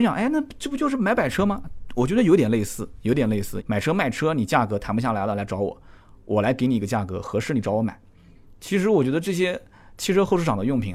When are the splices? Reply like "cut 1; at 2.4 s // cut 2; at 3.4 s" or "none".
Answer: cut 1; at 3.6 s